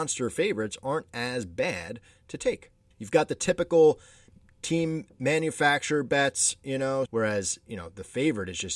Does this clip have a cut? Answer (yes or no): yes